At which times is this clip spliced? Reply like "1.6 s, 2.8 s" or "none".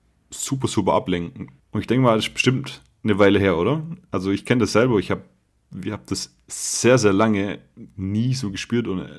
1.6 s

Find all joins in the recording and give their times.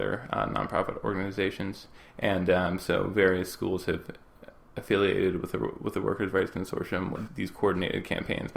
7.3 s

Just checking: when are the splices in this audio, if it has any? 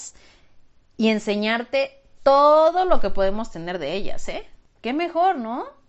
4.8 s

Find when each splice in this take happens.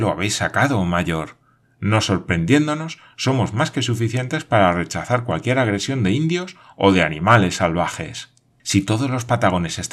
1.6 s, 8.6 s

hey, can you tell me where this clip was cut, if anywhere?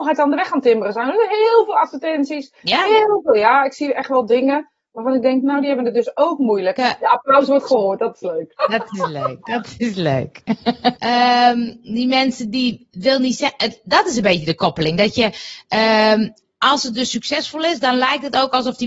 6.8 s, 8.6 s, 11.0 s

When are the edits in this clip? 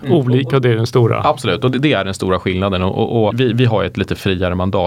3.3 s

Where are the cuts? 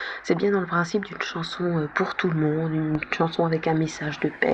none

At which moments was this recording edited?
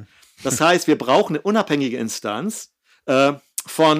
none

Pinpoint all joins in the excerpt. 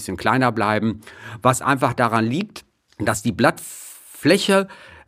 none

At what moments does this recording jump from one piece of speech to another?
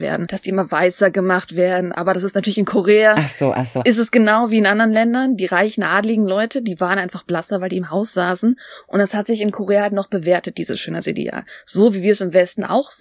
none

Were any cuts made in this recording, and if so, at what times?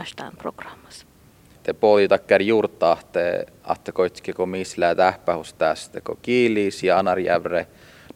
1.6 s

